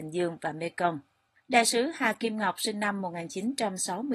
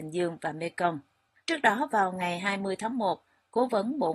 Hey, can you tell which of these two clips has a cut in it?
second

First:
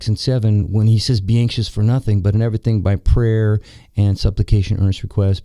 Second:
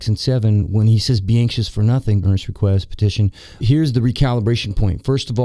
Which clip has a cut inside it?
second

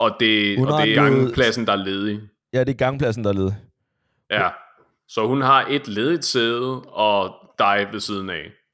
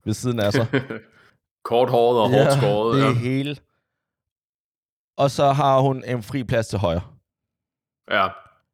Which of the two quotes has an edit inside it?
first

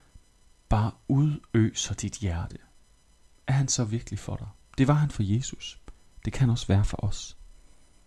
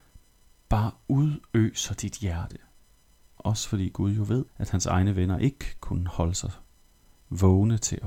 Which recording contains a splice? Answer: second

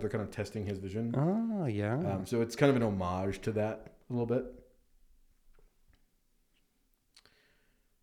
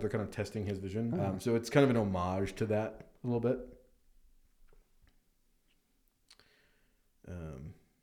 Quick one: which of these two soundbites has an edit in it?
second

